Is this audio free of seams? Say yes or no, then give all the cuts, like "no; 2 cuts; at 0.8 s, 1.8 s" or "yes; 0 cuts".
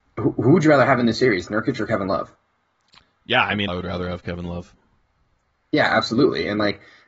no; 1 cut; at 3.7 s